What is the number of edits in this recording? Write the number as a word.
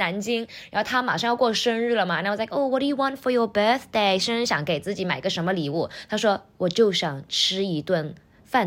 zero